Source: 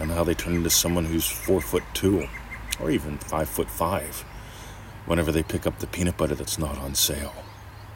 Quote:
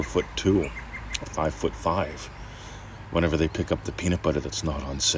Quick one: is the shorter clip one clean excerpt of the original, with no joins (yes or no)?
no